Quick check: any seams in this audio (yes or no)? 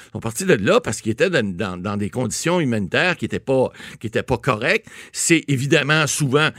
no